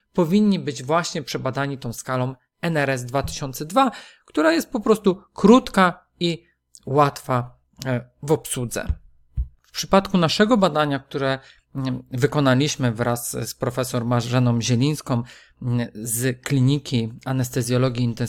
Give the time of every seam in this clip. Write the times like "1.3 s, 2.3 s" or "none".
none